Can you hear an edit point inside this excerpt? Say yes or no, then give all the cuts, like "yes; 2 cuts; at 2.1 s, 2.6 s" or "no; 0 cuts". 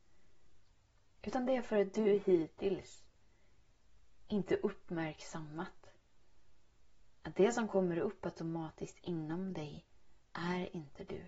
no; 0 cuts